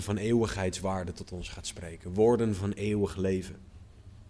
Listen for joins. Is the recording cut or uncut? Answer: uncut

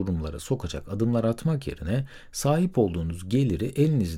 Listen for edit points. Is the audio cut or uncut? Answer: uncut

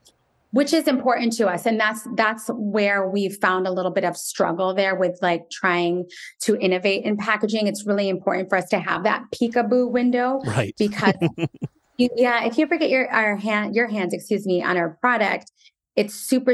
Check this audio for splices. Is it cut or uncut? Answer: uncut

